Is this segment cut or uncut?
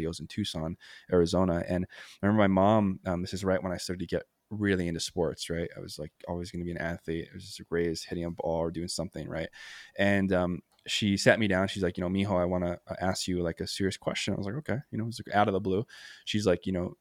uncut